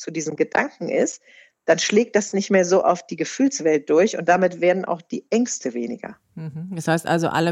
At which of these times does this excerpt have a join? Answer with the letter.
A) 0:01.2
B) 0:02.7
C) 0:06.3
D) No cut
D